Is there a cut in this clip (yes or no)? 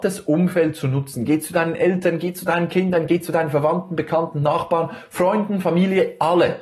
no